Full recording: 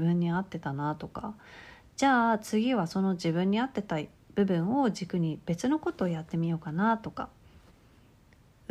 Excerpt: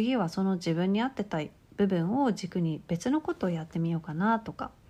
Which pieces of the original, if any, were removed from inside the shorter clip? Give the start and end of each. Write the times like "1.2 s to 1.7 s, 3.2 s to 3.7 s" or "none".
none